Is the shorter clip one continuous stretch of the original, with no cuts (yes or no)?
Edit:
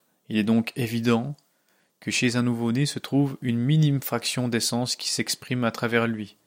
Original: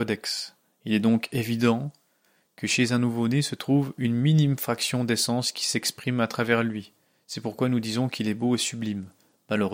yes